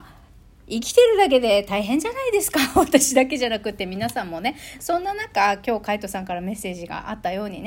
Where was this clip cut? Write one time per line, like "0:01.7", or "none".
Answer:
none

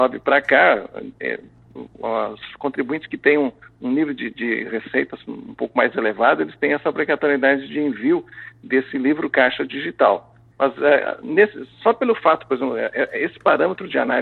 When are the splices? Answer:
0:10.5

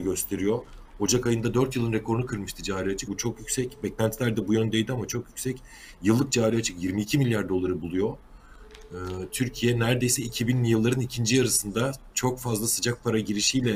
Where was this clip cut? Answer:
0:03.1

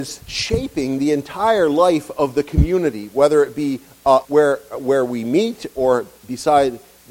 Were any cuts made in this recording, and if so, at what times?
0:04.2

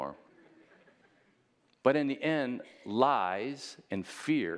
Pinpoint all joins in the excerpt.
none

